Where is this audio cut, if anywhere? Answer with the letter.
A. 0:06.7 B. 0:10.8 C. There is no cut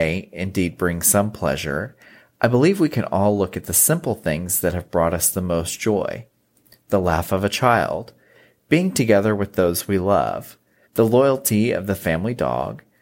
B